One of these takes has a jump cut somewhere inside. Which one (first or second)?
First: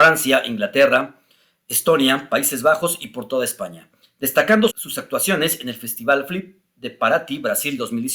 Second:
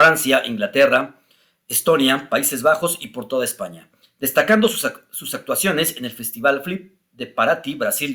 first